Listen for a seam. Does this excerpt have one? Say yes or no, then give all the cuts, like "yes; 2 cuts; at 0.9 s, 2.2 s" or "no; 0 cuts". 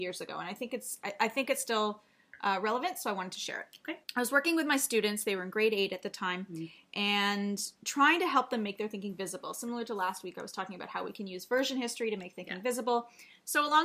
yes; 1 cut; at 4.0 s